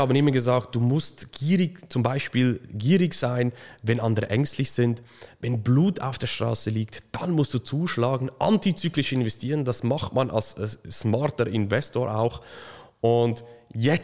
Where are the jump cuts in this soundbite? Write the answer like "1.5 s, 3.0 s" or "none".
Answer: none